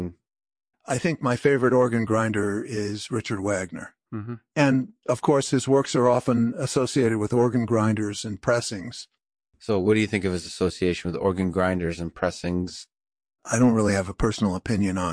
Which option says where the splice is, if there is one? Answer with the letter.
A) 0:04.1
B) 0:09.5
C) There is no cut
A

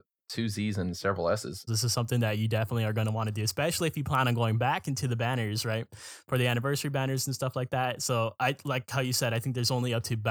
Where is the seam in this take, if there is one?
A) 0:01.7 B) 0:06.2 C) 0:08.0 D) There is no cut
A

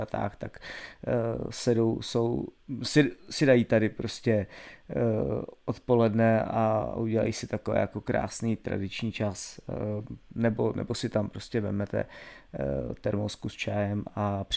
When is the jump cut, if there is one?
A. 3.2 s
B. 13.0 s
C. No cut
C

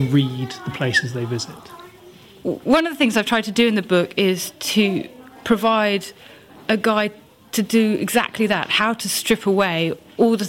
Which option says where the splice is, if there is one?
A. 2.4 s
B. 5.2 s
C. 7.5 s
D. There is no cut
D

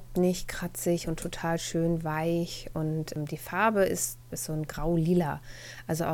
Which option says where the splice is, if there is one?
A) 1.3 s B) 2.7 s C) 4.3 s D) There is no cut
C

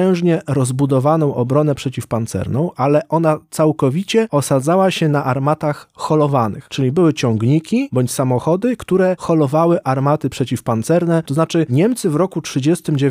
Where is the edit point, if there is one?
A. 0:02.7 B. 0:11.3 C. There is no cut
B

